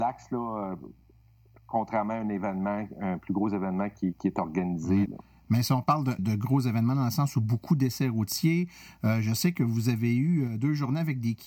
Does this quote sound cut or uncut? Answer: cut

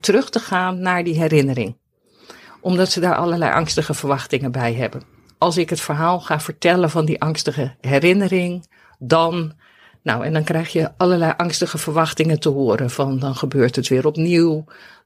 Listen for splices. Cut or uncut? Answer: uncut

